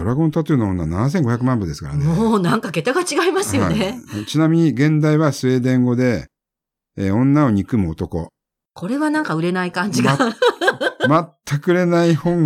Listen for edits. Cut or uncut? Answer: uncut